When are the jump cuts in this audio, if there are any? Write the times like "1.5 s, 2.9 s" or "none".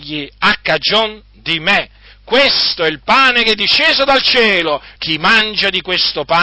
5.0 s